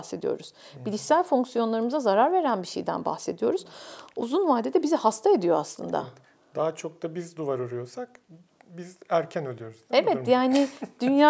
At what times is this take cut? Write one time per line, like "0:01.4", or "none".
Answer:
none